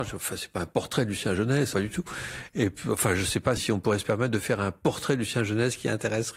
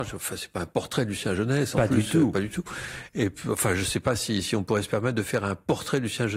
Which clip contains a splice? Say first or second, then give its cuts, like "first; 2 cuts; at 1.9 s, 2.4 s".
first; 2 cuts; at 1.7 s, 3.6 s